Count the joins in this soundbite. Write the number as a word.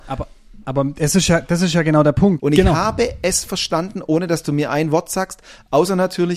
one